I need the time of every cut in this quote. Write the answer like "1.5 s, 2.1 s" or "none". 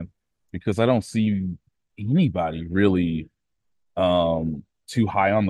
none